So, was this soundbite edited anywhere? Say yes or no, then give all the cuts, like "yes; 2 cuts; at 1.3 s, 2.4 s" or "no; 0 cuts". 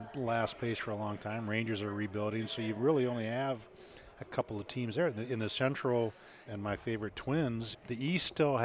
yes; 2 cuts; at 6.5 s, 7.7 s